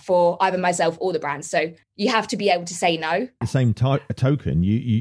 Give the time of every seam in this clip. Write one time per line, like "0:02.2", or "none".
0:01.8
0:03.4